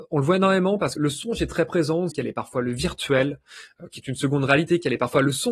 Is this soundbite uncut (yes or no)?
no